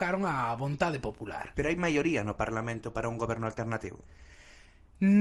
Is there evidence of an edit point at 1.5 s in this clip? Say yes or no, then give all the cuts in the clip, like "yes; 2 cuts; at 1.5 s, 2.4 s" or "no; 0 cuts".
yes; 1 cut; at 1.5 s